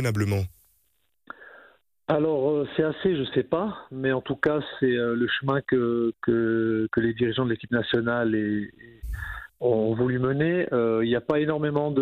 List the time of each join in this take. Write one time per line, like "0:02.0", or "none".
none